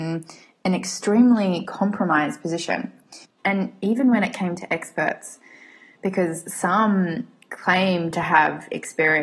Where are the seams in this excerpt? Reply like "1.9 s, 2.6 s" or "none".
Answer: 3.4 s